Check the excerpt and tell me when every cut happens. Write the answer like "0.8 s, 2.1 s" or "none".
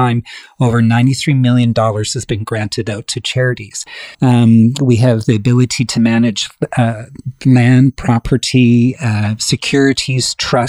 4.1 s